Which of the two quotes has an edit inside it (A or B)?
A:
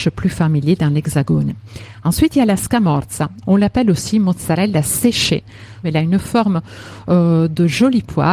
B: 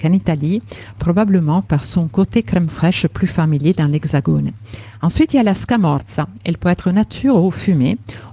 A